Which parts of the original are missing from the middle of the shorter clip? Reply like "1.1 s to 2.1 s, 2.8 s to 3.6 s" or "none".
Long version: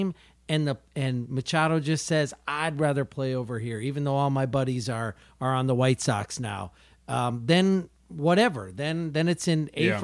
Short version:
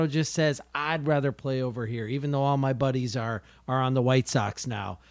none